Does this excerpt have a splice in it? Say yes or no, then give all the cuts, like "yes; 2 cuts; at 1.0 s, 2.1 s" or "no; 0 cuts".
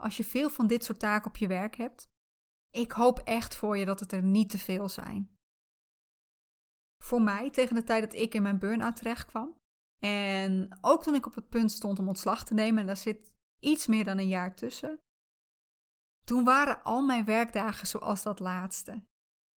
no; 0 cuts